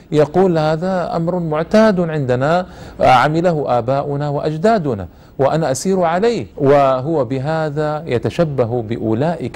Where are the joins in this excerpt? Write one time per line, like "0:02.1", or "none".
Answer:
0:06.5